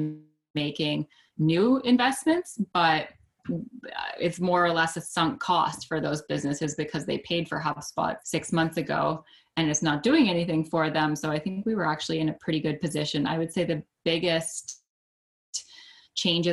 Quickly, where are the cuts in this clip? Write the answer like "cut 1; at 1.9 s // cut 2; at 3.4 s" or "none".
cut 1; at 8.2 s